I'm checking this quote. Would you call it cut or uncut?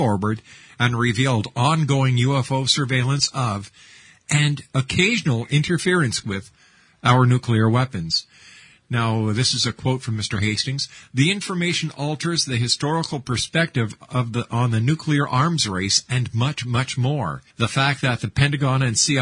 cut